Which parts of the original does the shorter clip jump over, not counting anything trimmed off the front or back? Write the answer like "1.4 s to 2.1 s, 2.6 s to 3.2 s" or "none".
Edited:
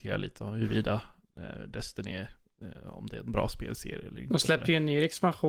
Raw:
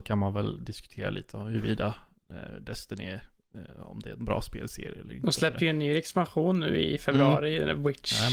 none